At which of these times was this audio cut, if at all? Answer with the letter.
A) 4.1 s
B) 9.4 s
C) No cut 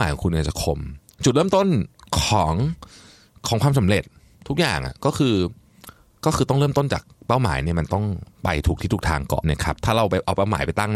B